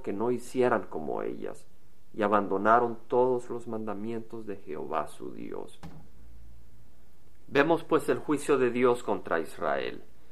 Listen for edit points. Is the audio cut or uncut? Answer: uncut